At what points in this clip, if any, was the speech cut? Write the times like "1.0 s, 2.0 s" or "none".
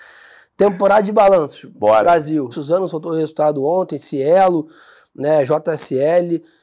2.5 s